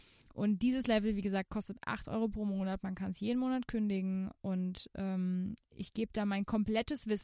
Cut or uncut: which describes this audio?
uncut